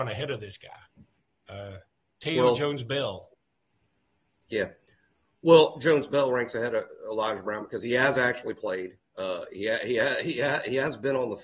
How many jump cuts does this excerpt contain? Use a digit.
0